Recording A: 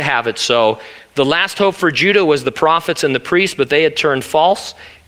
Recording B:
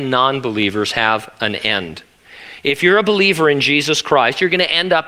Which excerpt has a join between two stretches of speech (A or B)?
A